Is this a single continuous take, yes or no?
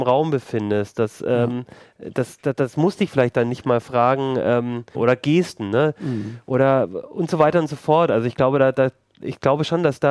no